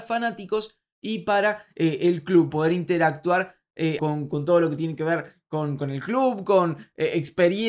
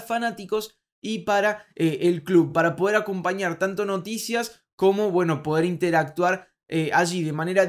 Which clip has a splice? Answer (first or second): first